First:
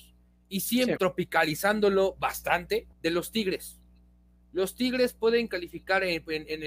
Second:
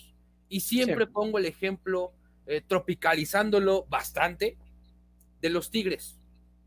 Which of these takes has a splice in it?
first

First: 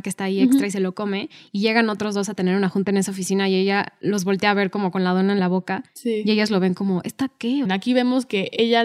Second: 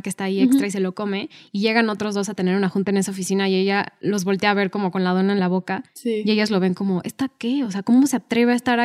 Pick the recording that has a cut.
first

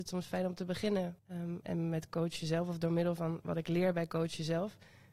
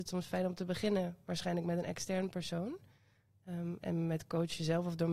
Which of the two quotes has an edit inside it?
first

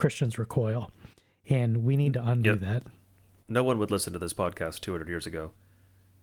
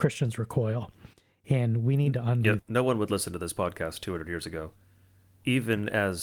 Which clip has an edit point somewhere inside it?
second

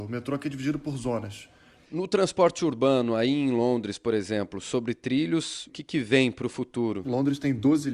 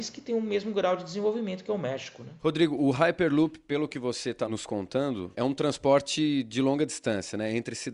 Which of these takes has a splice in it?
first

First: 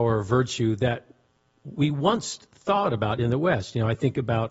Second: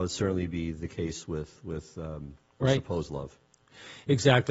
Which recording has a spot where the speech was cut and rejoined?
second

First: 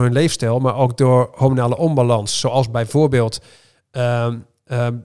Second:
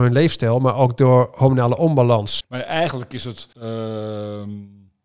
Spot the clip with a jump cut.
second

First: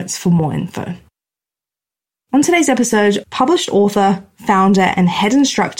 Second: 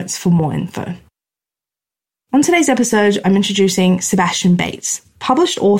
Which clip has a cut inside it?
first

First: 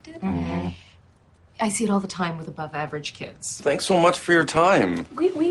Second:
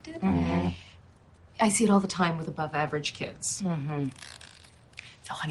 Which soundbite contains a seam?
first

